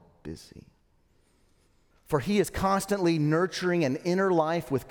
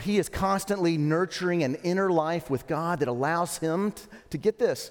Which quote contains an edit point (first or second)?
first